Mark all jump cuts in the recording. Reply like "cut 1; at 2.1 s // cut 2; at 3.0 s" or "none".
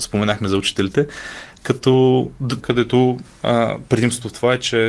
cut 1; at 2.6 s